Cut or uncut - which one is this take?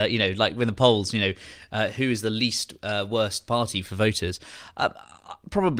uncut